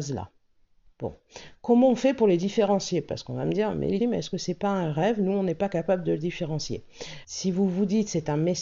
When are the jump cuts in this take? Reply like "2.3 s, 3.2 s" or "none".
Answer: 4.0 s, 7.2 s